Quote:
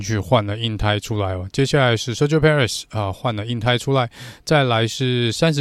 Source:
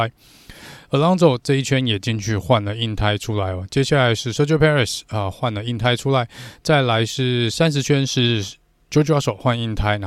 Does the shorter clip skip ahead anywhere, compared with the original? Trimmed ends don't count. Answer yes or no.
no